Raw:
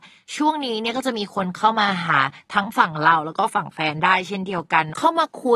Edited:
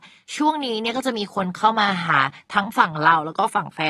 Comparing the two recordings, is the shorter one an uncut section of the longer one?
yes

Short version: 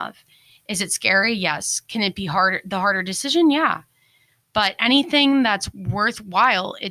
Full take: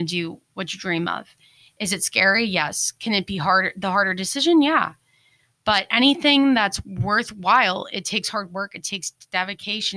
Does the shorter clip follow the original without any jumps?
yes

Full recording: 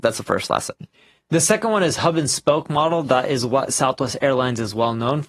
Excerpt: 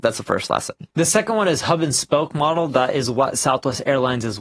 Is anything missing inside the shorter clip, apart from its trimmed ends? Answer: yes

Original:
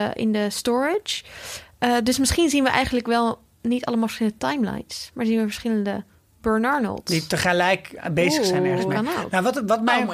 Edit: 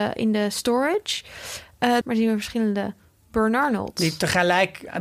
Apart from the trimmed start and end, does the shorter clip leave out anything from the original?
yes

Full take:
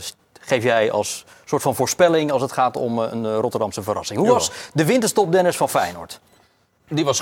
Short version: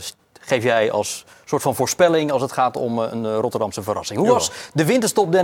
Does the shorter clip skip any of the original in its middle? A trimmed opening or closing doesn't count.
no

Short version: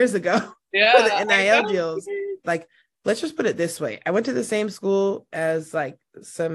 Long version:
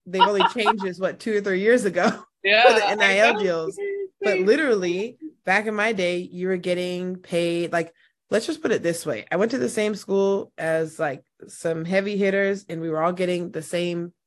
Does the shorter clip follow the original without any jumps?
no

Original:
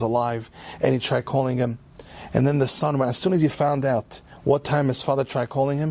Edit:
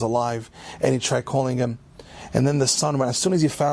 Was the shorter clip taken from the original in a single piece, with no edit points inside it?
yes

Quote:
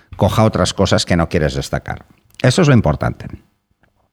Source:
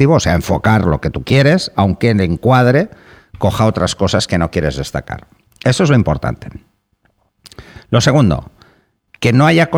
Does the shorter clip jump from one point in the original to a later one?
no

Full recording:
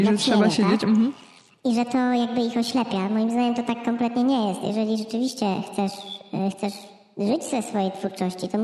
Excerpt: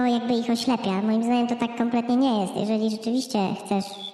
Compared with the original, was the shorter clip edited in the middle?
no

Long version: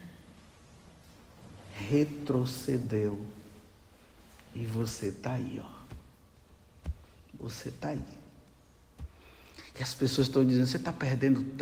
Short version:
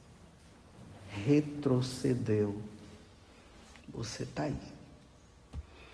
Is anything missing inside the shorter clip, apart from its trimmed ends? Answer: yes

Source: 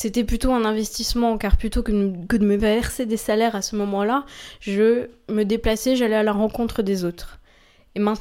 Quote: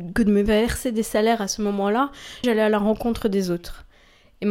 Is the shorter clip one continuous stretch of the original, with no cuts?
no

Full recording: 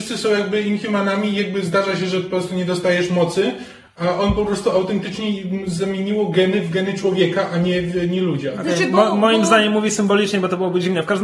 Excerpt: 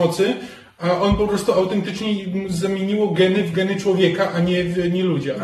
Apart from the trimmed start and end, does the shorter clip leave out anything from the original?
no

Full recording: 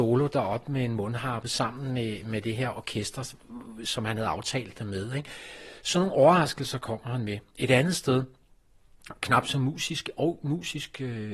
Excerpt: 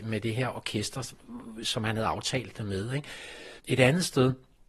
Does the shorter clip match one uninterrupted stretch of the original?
no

